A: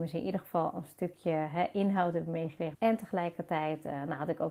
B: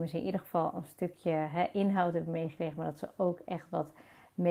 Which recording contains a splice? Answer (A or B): A